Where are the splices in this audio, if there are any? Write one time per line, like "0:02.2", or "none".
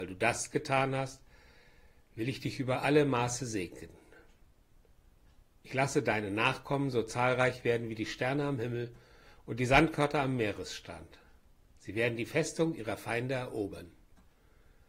none